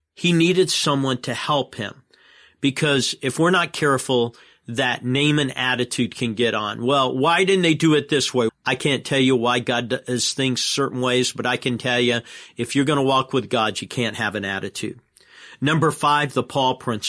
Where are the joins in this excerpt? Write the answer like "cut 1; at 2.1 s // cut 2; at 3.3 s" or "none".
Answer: cut 1; at 8.5 s

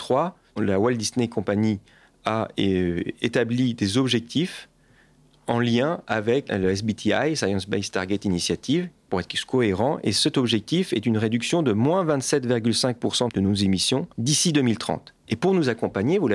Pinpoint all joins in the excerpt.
cut 1; at 14.1 s

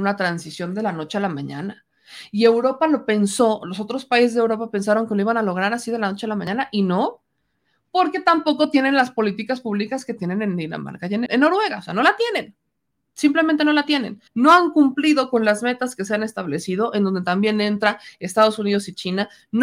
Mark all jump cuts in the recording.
cut 1; at 11.3 s // cut 2; at 14.3 s

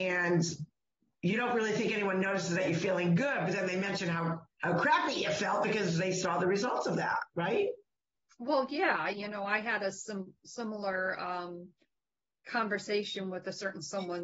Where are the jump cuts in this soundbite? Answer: none

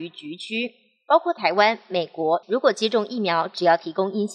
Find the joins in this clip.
cut 1; at 2.4 s

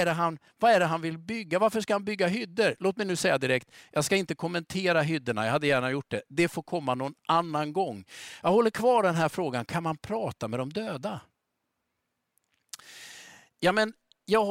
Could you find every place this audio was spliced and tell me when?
none

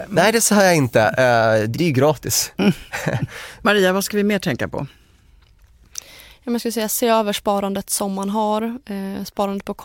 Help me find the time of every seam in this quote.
cut 1; at 1.7 s

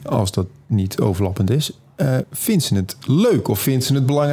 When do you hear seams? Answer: cut 1; at 2.2 s

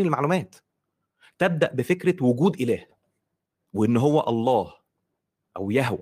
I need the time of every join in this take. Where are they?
none

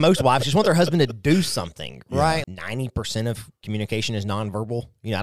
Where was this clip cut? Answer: cut 1; at 2.4 s

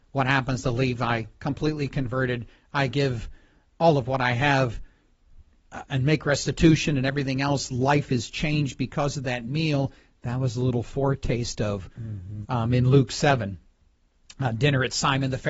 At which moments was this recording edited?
cut 1; at 12.4 s

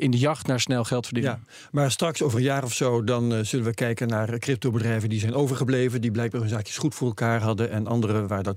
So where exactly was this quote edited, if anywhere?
none

